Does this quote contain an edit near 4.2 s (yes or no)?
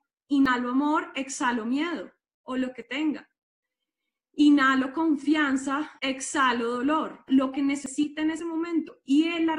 no